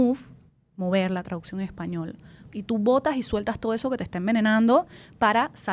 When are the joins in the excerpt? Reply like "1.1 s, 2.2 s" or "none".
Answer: 2.5 s